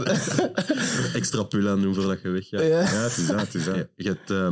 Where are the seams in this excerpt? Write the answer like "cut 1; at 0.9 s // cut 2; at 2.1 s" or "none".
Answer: none

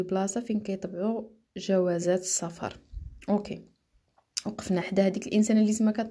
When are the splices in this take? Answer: cut 1; at 4.8 s

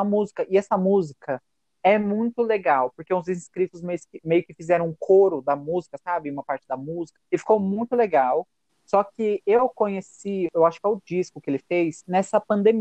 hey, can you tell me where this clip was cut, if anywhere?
cut 1; at 7.2 s // cut 2; at 8.7 s

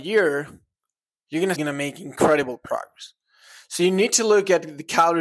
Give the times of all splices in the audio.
cut 1; at 1.5 s

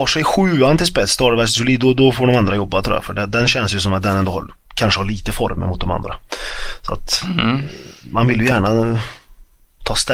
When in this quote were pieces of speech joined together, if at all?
none

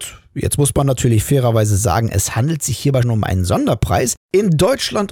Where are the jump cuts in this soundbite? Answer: cut 1; at 3.0 s // cut 2; at 4.2 s

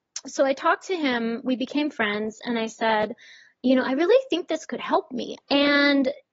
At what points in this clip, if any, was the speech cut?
cut 1; at 5.4 s

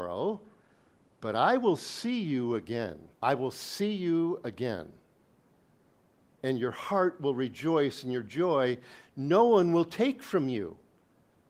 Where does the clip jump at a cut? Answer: cut 1; at 3.1 s

